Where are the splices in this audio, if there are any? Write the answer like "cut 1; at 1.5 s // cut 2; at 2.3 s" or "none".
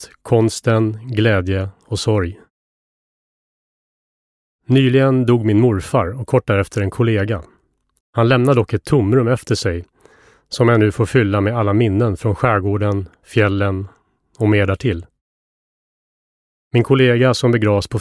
cut 1; at 8.0 s